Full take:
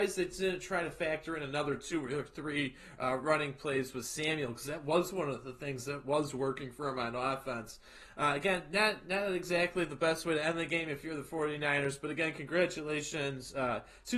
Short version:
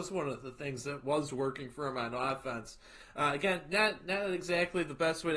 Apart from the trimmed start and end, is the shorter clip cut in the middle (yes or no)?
no